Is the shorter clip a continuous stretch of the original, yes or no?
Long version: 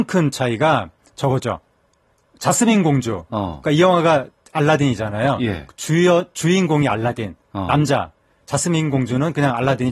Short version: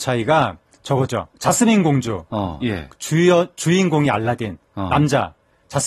no